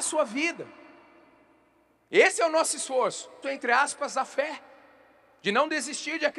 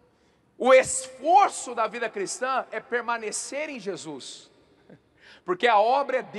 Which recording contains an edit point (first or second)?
first